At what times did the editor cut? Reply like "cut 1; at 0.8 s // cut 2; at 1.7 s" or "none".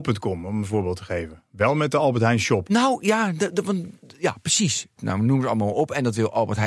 cut 1; at 2.7 s // cut 2; at 5.0 s